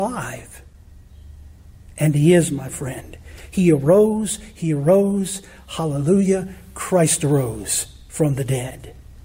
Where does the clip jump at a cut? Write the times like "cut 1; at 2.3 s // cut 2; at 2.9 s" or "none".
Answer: none